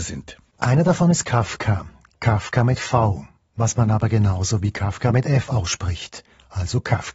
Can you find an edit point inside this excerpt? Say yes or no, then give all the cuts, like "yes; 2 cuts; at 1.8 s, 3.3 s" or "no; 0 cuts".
no; 0 cuts